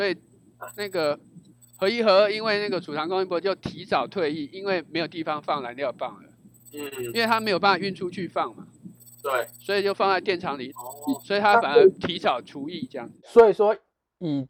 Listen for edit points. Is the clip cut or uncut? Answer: cut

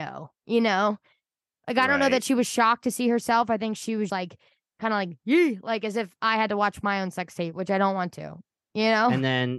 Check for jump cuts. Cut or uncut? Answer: cut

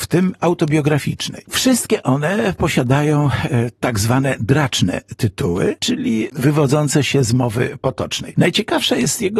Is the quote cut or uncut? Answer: uncut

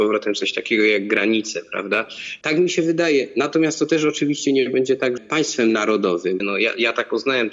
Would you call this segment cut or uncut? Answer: cut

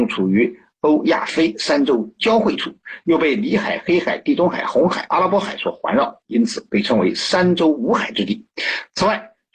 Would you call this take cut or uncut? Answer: uncut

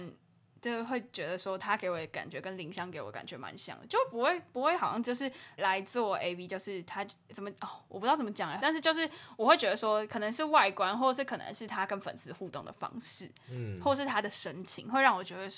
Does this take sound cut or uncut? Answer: cut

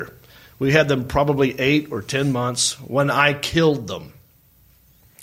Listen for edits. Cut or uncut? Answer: uncut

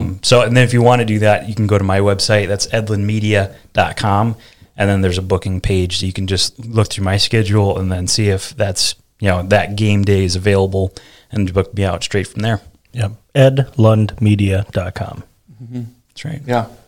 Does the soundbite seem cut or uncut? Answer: uncut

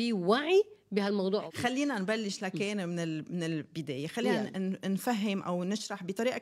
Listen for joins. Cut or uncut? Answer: uncut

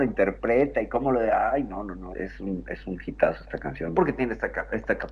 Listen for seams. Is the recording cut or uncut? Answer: cut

